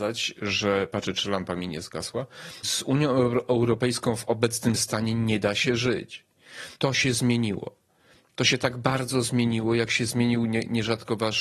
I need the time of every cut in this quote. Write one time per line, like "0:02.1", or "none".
0:02.6
0:06.7